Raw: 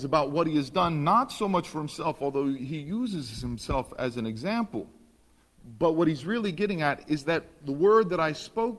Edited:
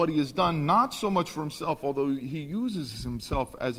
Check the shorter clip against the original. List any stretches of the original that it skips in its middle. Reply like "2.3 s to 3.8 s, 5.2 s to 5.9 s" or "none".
none

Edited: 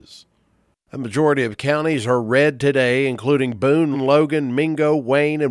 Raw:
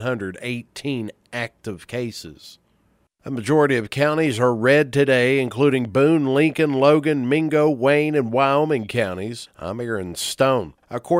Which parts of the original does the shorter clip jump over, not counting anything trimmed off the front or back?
6.3 s to 6.7 s

